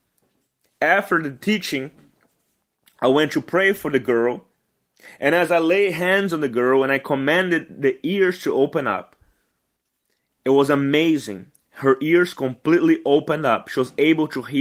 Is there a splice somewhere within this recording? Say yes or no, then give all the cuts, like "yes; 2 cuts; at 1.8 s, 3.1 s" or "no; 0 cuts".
no; 0 cuts